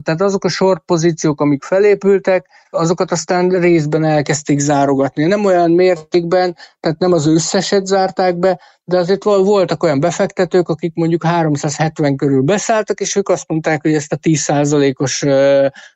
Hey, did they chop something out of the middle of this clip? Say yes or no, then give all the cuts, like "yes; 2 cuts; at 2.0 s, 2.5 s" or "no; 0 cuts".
yes; 1 cut; at 2.7 s